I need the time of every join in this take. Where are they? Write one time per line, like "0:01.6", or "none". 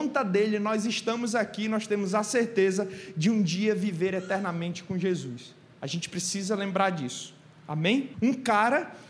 0:08.1